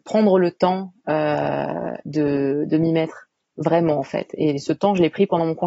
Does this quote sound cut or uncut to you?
uncut